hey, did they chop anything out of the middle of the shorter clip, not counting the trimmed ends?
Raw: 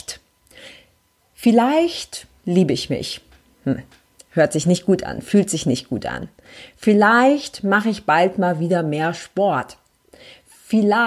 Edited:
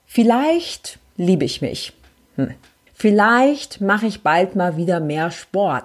yes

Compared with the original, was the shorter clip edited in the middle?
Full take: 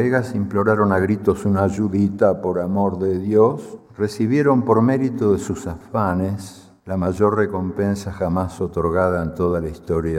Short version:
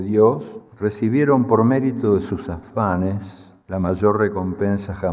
no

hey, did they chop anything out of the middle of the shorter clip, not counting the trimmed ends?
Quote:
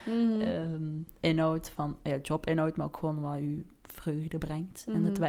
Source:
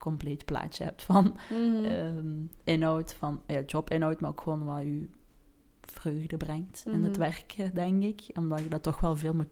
yes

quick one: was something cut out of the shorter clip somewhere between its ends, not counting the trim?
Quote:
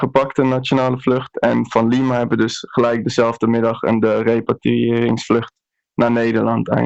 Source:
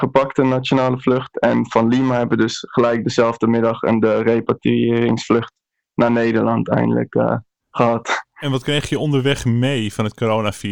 no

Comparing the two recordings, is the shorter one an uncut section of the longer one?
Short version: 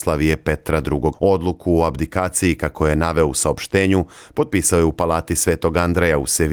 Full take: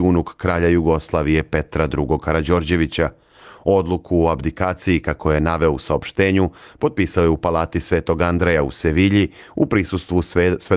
no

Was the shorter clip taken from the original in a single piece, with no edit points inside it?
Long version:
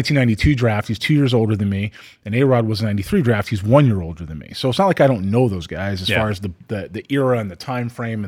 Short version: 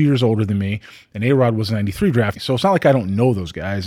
no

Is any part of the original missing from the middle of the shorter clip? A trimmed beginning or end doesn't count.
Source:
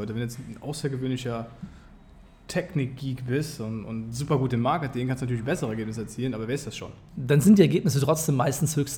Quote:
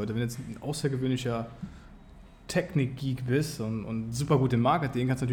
no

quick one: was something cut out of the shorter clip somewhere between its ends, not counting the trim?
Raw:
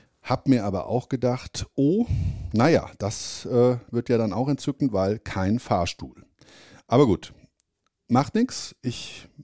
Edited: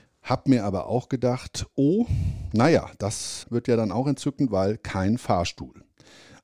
yes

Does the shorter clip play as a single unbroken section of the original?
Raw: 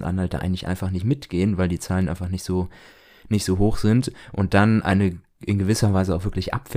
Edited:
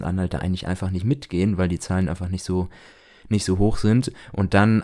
yes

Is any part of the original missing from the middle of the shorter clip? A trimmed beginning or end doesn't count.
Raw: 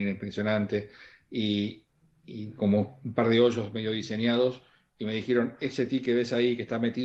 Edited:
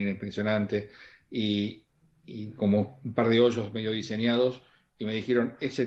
no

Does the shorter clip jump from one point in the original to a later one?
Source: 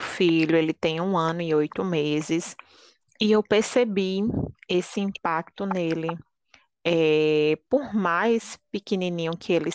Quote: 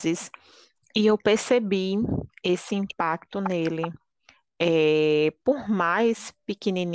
no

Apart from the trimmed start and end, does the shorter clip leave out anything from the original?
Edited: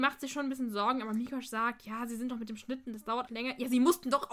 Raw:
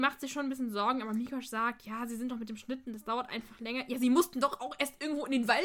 yes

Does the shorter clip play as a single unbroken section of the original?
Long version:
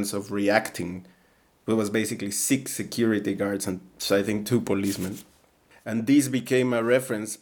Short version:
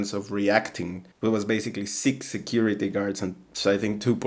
no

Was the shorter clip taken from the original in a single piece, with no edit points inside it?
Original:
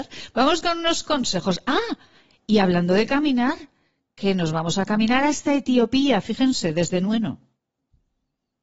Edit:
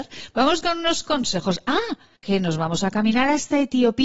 no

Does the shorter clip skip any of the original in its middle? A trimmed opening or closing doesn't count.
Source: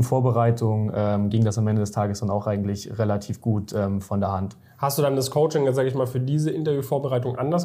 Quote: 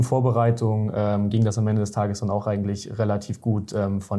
no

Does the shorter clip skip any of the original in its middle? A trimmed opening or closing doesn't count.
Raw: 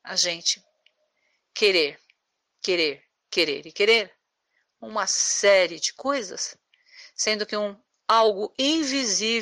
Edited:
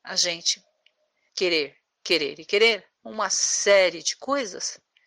yes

